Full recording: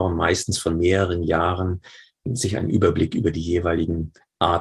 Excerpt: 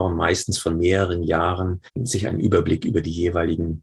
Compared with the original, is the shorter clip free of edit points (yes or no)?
no